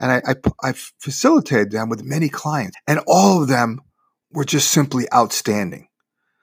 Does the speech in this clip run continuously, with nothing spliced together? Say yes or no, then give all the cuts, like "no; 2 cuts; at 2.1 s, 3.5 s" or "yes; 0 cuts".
no; 1 cut; at 2.7 s